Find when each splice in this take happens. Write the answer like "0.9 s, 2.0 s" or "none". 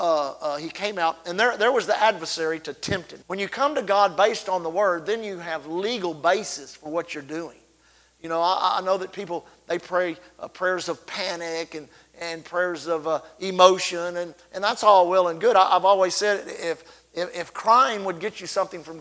3.2 s